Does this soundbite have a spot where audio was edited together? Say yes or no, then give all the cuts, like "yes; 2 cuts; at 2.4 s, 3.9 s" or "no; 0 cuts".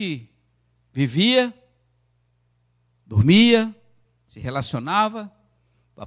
yes; 1 cut; at 4.0 s